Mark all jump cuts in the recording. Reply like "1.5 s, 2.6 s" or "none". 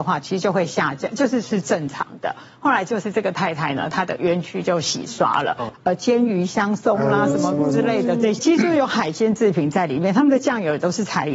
5.7 s